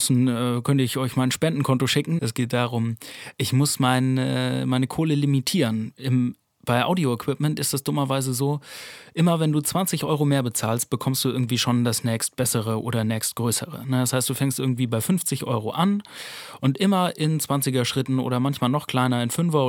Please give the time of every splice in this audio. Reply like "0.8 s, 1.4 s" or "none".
2.2 s